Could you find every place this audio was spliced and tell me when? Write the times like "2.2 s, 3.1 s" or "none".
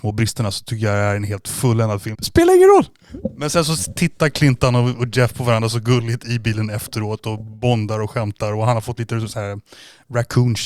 2.1 s